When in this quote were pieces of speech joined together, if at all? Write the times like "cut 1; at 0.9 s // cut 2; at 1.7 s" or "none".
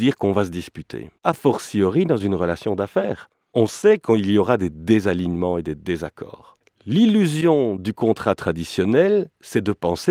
cut 1; at 1.2 s